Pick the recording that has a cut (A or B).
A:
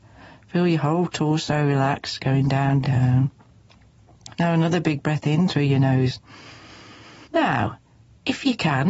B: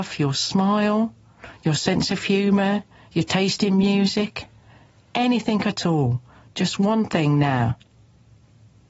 A